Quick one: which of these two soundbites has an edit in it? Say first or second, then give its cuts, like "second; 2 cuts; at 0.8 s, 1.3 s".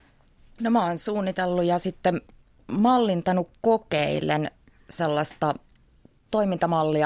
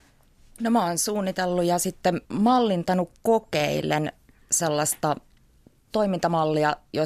second; 1 cut; at 2.2 s